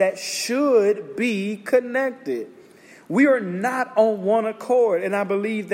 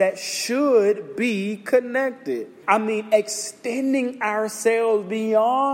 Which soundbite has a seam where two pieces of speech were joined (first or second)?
second